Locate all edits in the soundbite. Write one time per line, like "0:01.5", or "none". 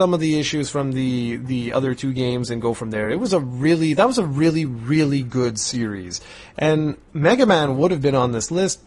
none